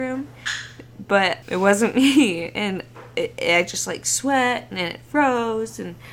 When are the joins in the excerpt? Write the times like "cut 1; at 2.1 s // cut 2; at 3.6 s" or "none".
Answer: cut 1; at 1.4 s